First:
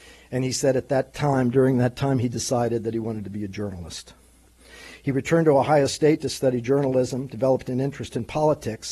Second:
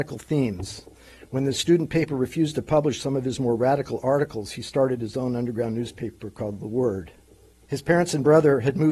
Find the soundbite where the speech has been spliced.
second; 1 cut; at 7.6 s

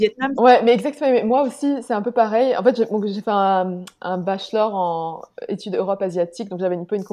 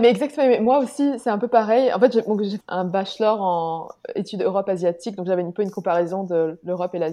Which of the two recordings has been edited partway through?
second; 1 cut; at 2.6 s

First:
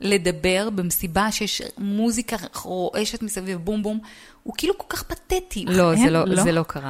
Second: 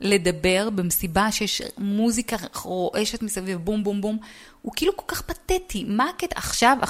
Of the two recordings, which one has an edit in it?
first; 2 cuts; at 3.8 s, 5.7 s

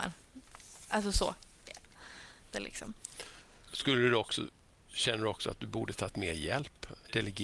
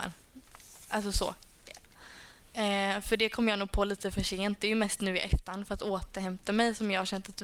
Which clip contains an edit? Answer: first; 1 cut; at 2.5 s

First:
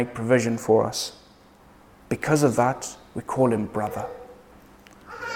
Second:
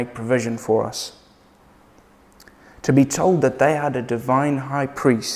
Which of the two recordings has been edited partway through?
first; 1 cut; at 1.9 s

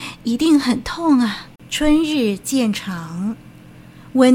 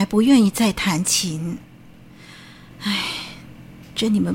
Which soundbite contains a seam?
first; 1 cut; at 1.6 s

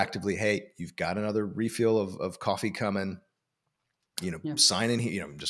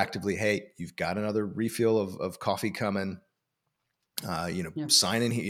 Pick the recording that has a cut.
first; 1 cut; at 4.2 s

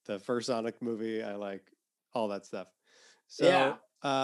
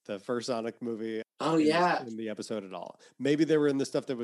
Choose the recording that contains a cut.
second; 1 cut; at 1.2 s

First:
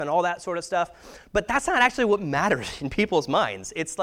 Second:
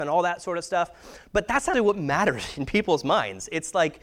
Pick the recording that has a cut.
second; 1 cut; at 1.7 s

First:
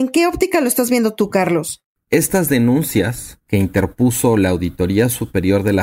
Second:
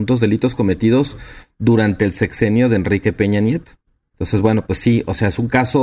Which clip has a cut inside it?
first; 1 cut; at 2.0 s

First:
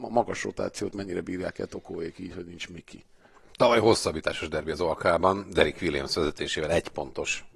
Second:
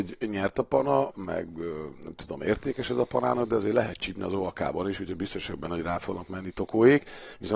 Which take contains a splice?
second; 1 cut; at 1.1 s

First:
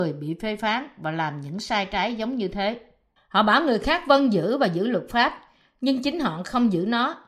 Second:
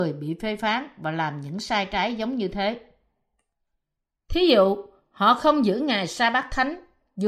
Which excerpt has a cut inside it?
first; 1 cut; at 3.2 s

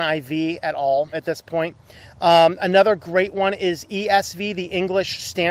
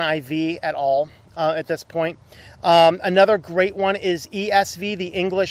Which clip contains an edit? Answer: first; 1 cut; at 1.1 s

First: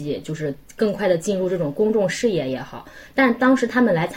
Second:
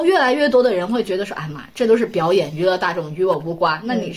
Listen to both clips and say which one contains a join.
first; 1 cut; at 1.7 s

